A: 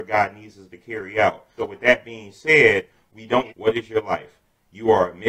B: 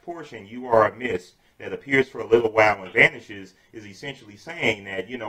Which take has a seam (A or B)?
A